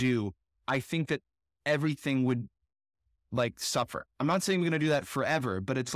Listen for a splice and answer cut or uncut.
cut